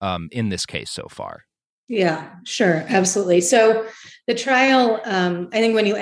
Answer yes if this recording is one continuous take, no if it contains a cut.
yes